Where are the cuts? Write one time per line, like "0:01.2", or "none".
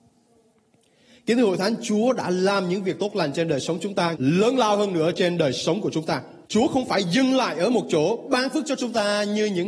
0:04.1
0:06.4